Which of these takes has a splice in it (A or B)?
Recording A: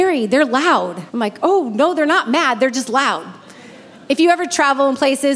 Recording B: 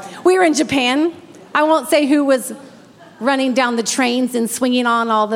A